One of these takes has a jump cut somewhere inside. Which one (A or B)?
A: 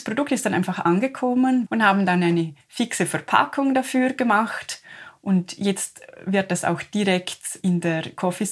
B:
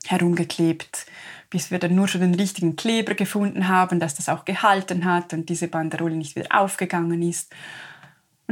A